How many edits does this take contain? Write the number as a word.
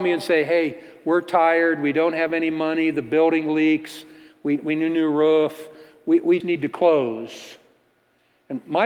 one